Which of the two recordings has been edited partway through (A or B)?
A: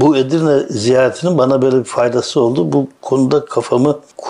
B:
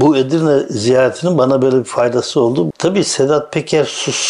B